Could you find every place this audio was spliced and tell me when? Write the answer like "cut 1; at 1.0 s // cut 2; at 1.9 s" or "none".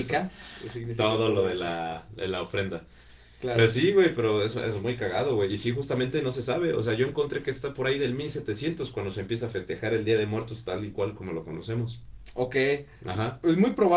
none